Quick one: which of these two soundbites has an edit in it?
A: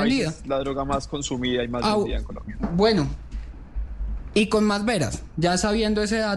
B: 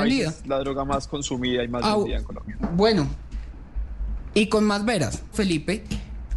B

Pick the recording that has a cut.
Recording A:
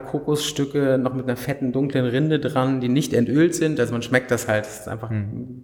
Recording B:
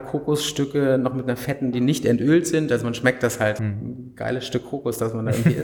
B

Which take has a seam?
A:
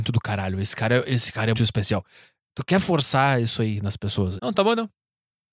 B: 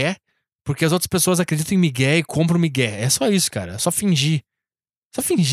A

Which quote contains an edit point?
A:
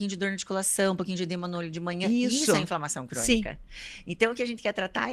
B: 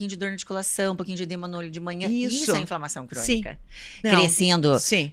B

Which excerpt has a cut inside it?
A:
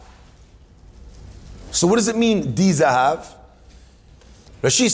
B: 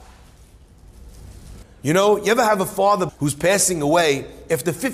B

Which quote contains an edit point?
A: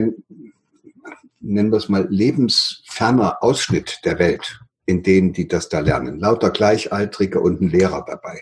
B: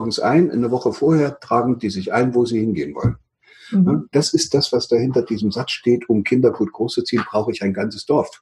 B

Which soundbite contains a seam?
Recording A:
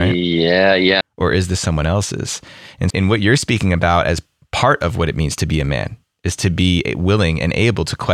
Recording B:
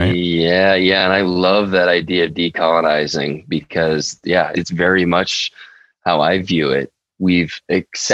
A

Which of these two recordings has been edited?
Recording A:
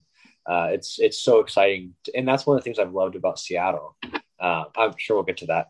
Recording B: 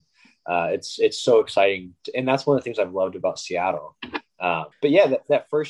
B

